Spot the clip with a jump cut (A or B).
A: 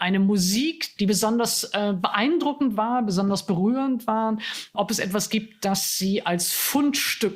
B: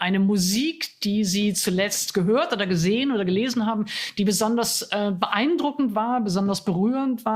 A